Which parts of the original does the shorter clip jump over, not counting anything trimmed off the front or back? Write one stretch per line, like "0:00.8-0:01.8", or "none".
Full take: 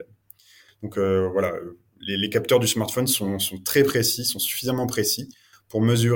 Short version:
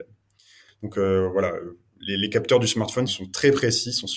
0:03.1-0:03.4